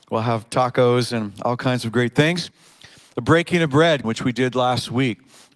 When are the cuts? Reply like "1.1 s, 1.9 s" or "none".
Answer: 4.0 s